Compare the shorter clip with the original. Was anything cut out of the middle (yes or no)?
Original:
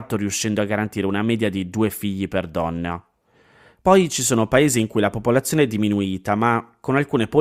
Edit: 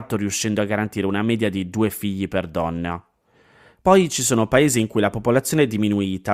no